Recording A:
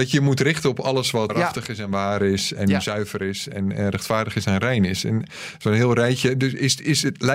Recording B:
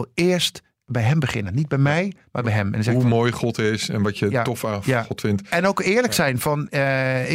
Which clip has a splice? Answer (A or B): A